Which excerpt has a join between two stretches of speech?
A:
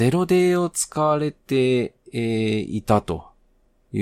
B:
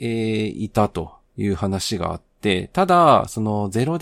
B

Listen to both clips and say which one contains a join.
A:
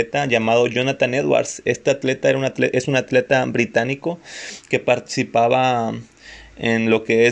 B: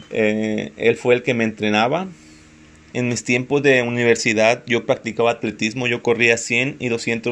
B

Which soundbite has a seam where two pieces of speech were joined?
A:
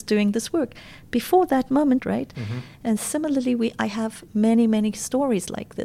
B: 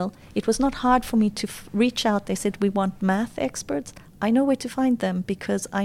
A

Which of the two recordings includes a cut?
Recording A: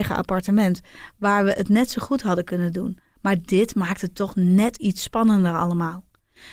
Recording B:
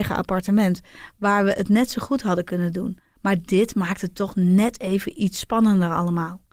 A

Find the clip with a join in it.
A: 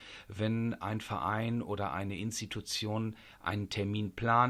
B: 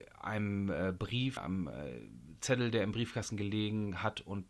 B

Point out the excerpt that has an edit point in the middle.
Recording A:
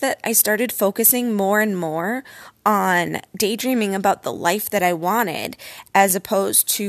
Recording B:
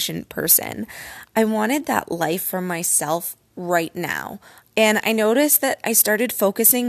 B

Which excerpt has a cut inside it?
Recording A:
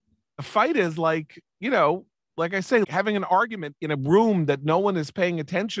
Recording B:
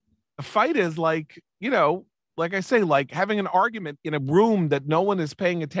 A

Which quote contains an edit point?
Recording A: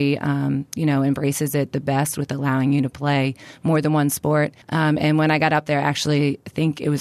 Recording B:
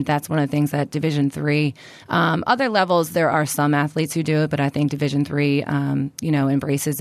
A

